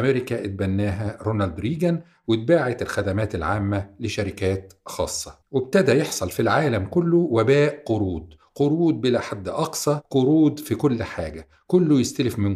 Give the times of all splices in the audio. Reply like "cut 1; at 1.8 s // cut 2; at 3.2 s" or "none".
cut 1; at 5.4 s

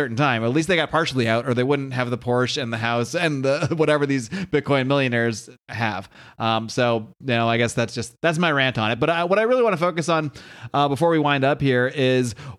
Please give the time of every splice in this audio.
none

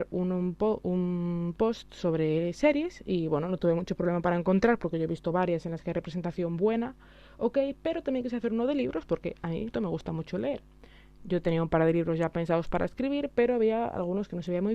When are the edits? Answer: cut 1; at 9.7 s

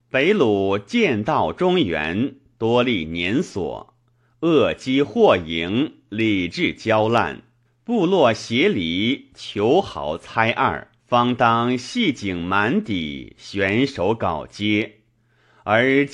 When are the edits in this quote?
cut 1; at 7.6 s // cut 2; at 11.0 s

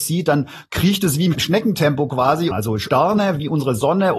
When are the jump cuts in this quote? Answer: cut 1; at 2.5 s

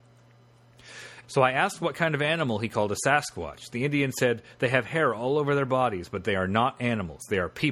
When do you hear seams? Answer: cut 1; at 1.2 s

